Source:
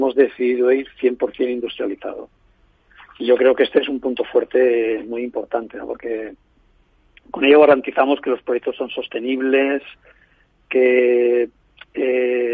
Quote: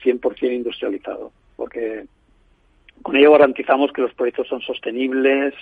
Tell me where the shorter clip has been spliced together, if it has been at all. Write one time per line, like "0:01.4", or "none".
0:01.6